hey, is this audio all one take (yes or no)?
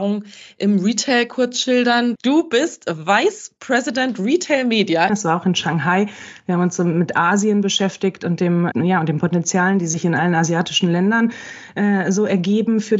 no